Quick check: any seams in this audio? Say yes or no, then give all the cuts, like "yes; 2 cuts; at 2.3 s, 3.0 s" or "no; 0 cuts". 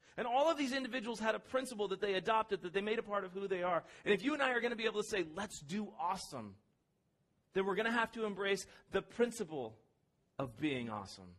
no; 0 cuts